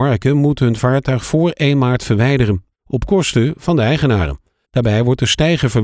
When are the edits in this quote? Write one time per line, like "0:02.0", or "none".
0:02.7
0:04.6